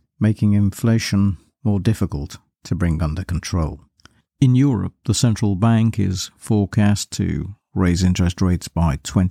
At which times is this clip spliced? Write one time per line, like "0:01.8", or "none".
0:04.3